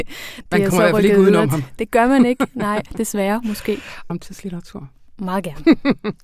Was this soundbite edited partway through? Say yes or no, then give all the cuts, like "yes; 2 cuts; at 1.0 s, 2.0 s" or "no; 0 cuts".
yes; 1 cut; at 4.1 s